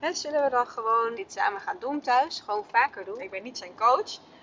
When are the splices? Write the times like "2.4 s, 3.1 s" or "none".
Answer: 1.1 s, 3.2 s